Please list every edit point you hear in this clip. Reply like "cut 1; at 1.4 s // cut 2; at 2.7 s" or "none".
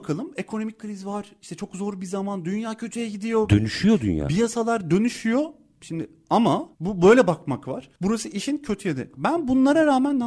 cut 1; at 6.7 s // cut 2; at 9.1 s